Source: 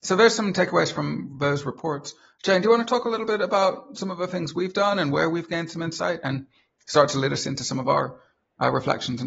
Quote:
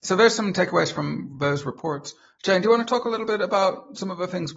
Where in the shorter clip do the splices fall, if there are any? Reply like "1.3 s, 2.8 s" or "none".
none